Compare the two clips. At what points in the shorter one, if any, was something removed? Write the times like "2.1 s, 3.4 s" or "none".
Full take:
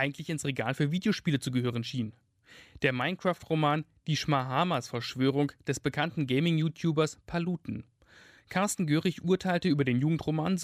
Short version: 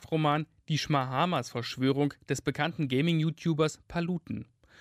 none